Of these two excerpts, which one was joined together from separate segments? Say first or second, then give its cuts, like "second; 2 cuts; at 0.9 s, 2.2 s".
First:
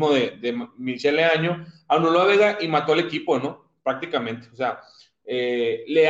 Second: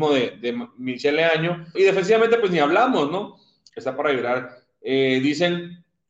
second; 2 cuts; at 1.7 s, 3.7 s